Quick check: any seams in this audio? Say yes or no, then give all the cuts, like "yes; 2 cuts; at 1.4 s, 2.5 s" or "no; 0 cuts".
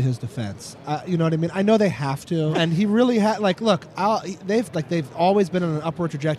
yes; 2 cuts; at 2.5 s, 4.7 s